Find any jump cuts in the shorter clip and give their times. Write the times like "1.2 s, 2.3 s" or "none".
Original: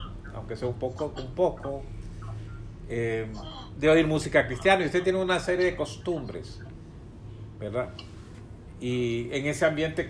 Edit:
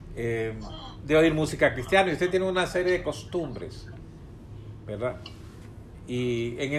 none